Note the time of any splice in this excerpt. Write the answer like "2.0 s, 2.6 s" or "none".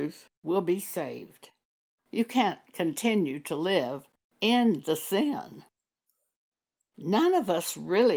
1.9 s